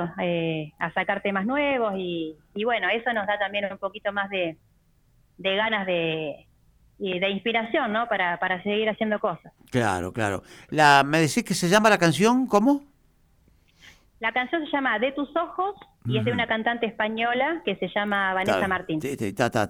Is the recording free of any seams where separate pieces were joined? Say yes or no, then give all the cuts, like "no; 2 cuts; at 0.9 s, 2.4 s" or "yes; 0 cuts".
yes; 0 cuts